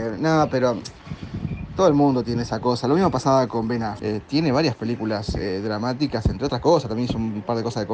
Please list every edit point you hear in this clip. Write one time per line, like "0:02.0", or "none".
0:04.0